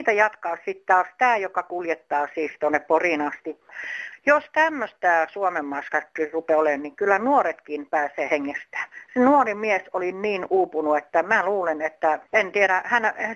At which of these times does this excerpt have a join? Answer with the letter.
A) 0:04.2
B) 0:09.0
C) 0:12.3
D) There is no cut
C